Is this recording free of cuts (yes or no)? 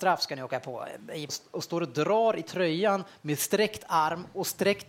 no